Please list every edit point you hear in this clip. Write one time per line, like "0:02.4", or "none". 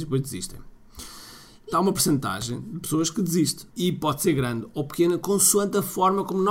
0:01.7
0:03.7